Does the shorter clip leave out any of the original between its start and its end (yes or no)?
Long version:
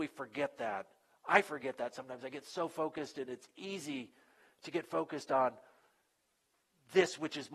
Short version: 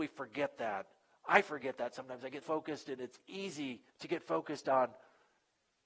yes